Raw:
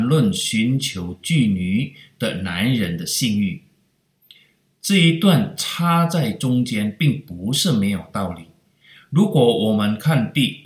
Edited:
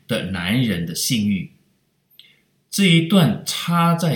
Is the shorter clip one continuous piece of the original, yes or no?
yes